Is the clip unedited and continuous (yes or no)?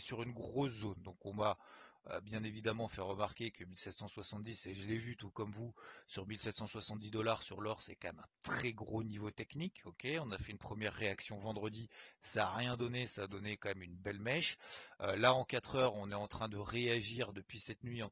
yes